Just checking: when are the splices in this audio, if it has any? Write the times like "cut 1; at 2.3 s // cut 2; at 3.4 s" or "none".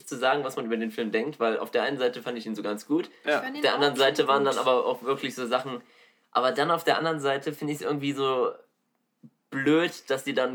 cut 1; at 6.2 s